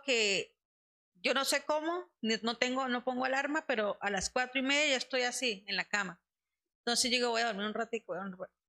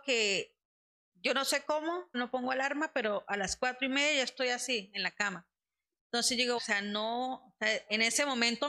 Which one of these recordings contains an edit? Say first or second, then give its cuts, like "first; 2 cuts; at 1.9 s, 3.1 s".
second; 2 cuts; at 2.1 s, 6.6 s